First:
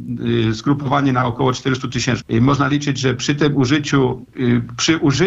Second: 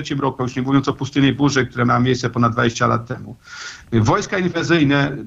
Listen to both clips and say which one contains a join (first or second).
first